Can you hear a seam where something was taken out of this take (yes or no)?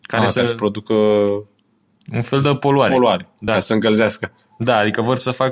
no